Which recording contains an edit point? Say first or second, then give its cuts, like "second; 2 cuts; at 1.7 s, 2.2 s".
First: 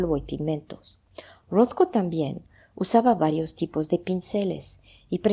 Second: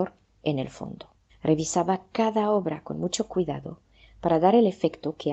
second; 1 cut; at 1.3 s